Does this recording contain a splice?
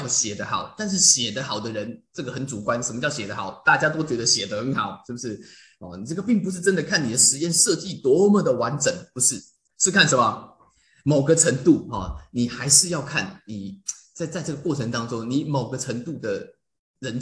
no; 0 cuts

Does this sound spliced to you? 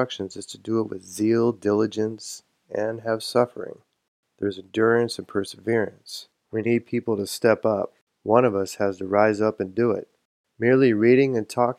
yes; 1 cut; at 6.4 s

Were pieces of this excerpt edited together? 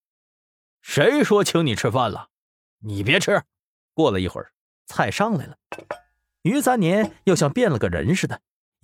yes; 1 cut; at 3.9 s

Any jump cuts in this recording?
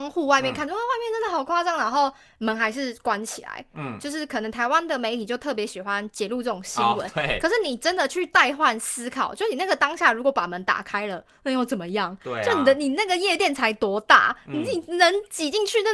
no; 0 cuts

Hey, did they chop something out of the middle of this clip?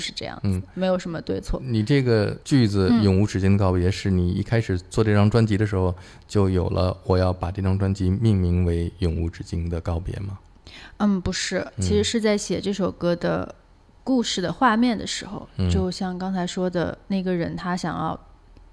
yes; 1 cut; at 2.4 s

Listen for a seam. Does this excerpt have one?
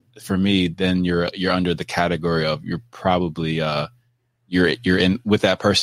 no; 0 cuts

